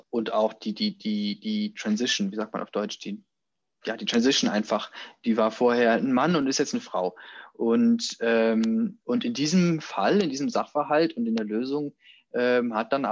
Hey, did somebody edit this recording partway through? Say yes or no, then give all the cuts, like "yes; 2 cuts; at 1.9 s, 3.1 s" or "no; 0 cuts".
no; 0 cuts